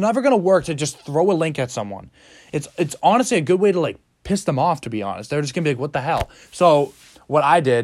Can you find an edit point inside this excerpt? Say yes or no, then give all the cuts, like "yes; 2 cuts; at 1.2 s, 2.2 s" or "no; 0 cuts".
no; 0 cuts